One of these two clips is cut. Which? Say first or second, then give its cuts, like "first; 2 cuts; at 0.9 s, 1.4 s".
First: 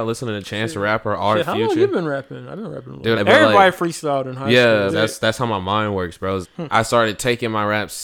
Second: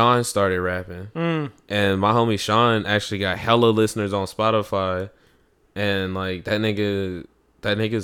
first; 3 cuts; at 3.2 s, 4.9 s, 6.4 s